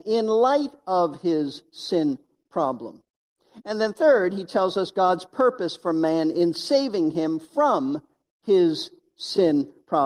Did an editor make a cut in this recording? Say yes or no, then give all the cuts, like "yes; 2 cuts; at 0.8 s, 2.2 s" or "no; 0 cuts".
no; 0 cuts